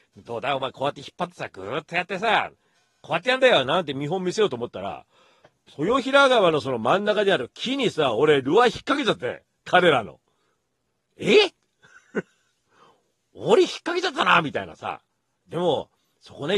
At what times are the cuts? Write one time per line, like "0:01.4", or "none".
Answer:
none